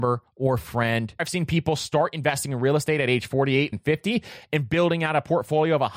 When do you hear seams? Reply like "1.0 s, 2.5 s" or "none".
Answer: 1.2 s, 3.7 s

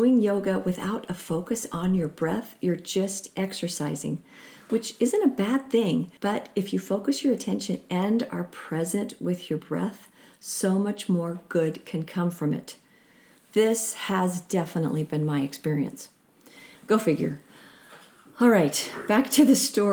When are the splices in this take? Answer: 6.2 s, 16.8 s

